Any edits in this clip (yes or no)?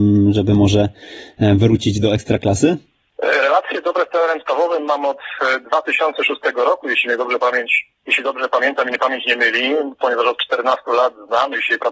no